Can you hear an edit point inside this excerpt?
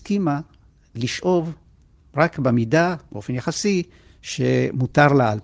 no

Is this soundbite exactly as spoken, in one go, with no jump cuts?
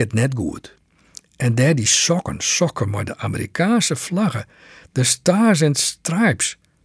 yes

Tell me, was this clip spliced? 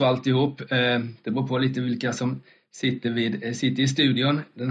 no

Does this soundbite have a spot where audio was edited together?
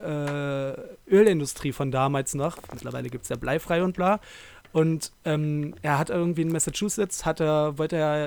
no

